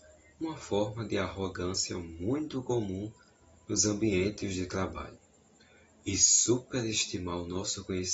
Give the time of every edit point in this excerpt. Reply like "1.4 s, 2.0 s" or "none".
none